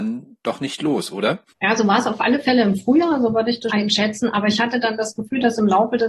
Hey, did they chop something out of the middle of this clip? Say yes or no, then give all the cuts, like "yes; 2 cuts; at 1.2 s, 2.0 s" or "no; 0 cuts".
yes; 1 cut; at 3.7 s